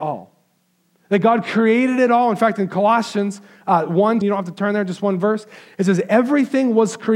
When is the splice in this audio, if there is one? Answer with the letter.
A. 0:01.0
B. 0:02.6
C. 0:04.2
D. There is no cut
C